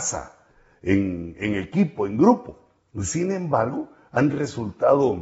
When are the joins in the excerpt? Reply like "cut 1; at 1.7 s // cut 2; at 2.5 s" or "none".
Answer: none

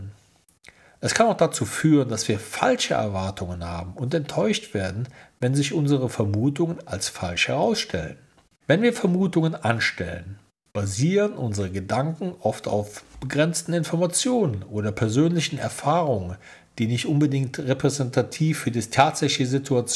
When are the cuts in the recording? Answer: cut 1; at 8.6 s

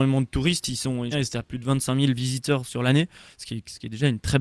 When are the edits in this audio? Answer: cut 1; at 1.1 s

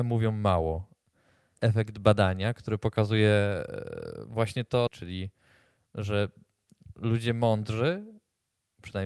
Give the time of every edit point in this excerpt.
cut 1; at 1.5 s // cut 2; at 4.9 s

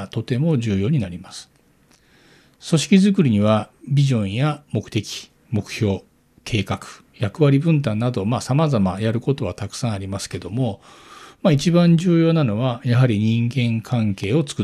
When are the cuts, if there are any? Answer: none

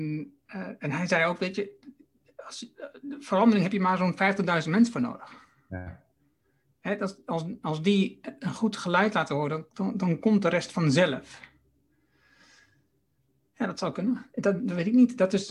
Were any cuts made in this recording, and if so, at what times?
none

